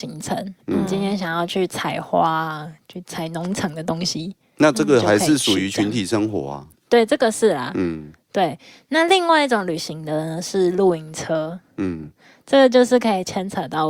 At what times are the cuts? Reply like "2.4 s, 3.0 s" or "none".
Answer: none